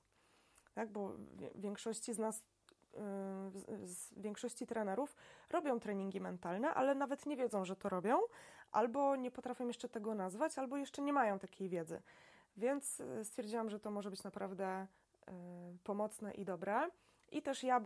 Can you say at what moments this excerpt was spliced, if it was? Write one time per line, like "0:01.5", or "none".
none

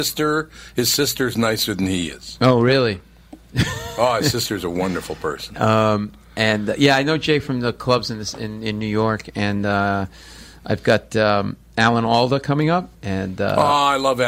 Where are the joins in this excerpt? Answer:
0:12.9

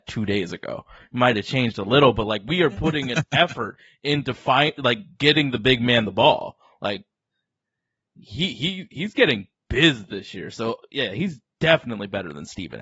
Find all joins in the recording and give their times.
none

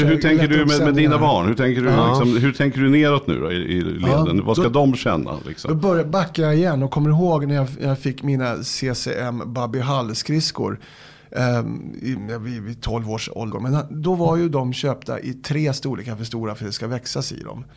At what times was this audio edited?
0:13.5

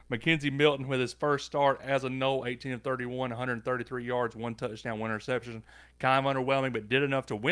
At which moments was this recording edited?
none

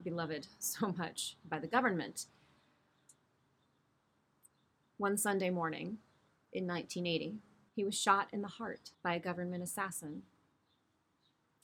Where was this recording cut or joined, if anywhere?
0:07.7
0:08.9

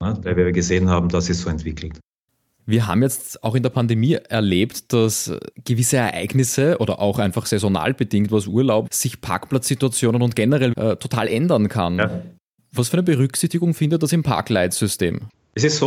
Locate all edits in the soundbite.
0:08.9
0:10.7

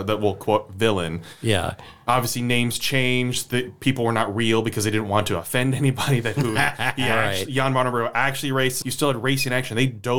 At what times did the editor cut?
0:08.8

